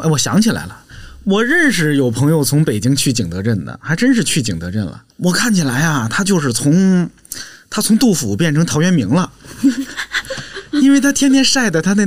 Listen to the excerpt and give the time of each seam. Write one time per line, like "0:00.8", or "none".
0:05.1